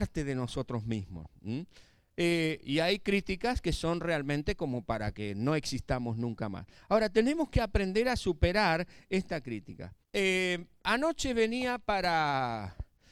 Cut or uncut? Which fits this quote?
cut